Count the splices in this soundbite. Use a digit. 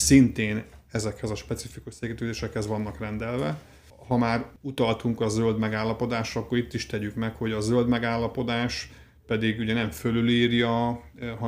0